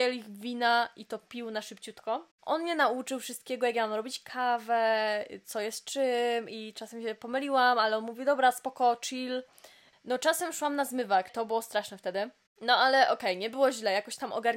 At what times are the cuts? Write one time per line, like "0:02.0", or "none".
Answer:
0:09.9
0:11.3